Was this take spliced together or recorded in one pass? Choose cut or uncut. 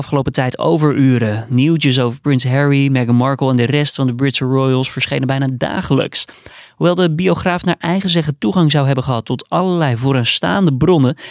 uncut